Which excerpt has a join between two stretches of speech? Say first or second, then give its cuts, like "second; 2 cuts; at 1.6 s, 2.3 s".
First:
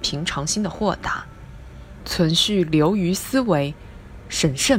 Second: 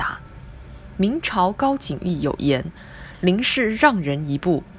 first; 1 cut; at 2.0 s